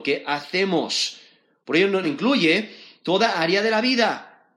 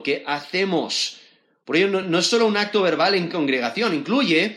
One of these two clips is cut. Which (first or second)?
first